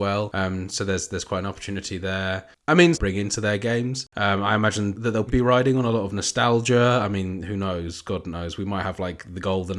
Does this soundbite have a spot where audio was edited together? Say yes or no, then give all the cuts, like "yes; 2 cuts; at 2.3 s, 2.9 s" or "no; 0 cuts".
yes; 2 cuts; at 2.9 s, 5.3 s